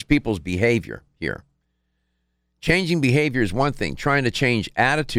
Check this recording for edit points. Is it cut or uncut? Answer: uncut